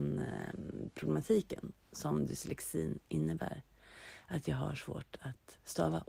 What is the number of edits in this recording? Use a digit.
0